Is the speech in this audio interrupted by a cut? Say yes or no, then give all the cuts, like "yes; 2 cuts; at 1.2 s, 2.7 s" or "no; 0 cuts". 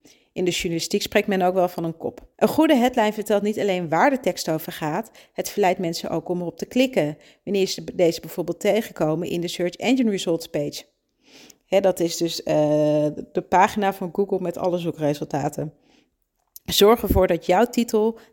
yes; 1 cut; at 2.3 s